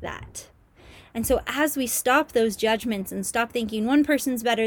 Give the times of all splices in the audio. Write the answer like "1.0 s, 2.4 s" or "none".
none